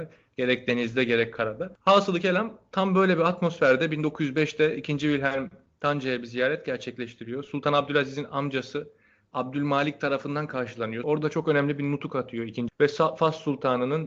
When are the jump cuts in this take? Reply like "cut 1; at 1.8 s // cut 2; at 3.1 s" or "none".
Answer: cut 1; at 11.0 s // cut 2; at 12.7 s